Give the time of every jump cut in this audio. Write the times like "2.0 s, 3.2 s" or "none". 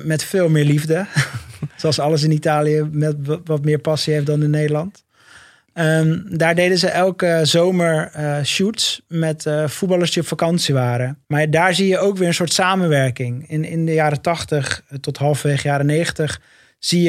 11.2 s